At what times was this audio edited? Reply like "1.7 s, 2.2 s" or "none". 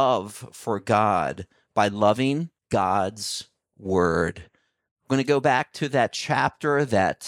2.6 s